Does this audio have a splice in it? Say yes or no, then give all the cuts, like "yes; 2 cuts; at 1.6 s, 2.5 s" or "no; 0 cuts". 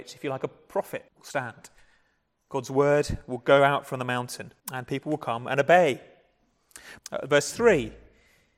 yes; 3 cuts; at 1.1 s, 4.6 s, 7.0 s